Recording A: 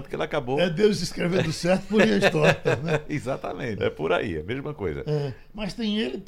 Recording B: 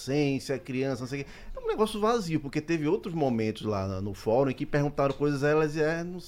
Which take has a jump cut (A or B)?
A